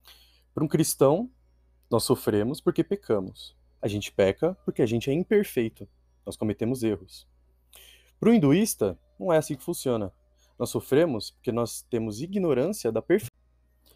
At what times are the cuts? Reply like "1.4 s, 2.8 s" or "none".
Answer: 3.8 s